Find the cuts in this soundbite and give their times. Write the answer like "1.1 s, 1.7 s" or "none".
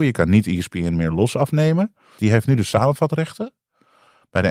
2.2 s

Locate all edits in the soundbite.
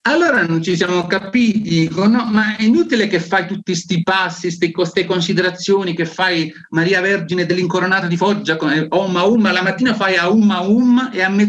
none

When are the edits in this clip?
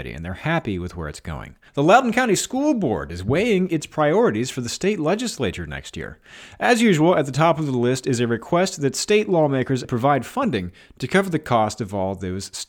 1.7 s, 9.8 s

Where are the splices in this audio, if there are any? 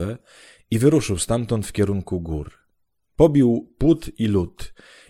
none

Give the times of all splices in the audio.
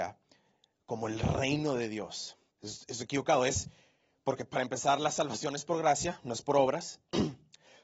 2.5 s

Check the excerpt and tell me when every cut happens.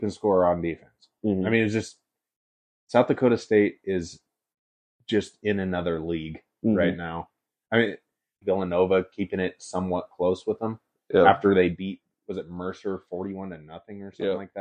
8.4 s

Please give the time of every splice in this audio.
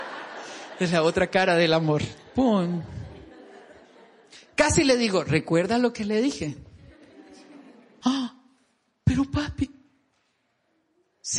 8.0 s

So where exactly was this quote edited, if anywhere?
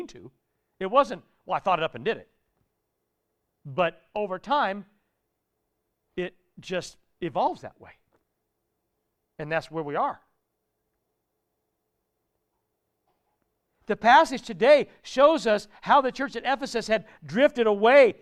none

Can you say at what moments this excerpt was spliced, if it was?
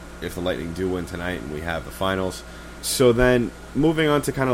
2.8 s

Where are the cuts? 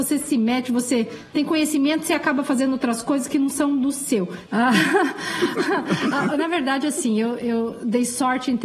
4.5 s

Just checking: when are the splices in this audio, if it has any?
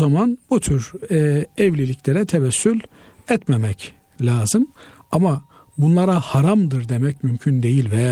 none

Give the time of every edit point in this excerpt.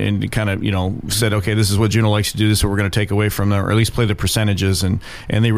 none

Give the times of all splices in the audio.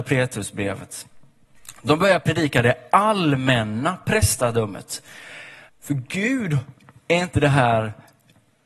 5.7 s

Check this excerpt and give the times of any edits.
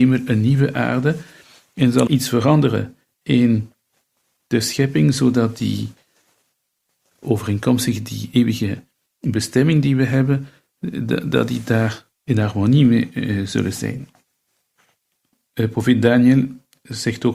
2.1 s, 12.1 s

